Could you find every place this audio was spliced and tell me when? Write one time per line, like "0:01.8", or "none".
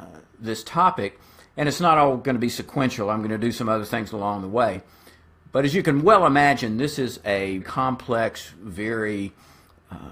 0:07.6